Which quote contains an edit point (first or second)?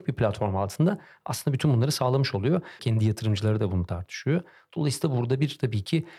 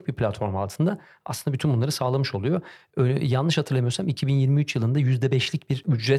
first